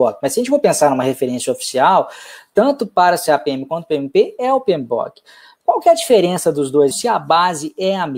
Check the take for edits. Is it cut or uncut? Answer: cut